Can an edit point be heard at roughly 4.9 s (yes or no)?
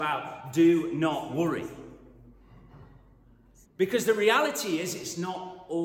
no